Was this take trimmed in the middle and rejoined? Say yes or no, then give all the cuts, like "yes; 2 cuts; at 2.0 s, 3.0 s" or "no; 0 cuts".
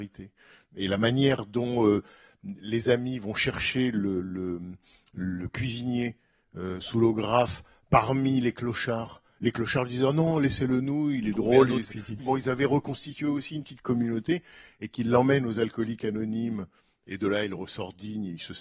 yes; 1 cut; at 12.2 s